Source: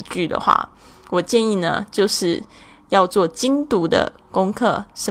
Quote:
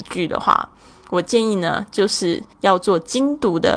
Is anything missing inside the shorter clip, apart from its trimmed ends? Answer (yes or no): yes